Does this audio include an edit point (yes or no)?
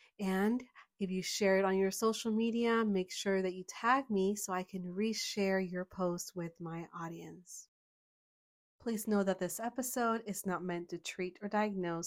no